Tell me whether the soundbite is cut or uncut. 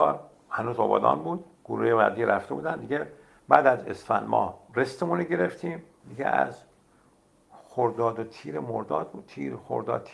cut